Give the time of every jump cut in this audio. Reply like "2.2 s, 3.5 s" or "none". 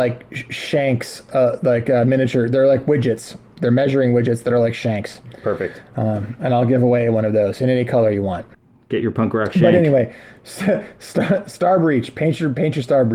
none